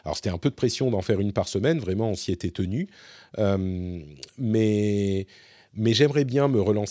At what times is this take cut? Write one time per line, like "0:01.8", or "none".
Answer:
none

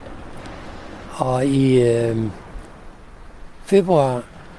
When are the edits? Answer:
none

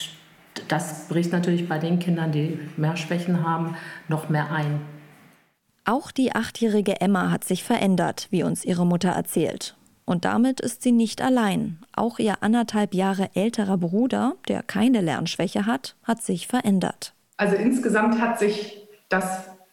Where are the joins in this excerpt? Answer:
none

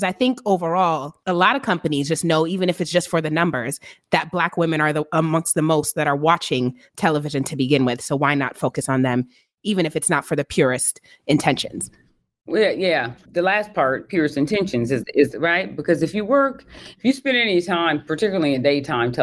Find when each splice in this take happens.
none

